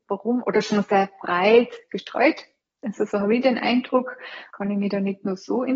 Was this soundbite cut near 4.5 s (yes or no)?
yes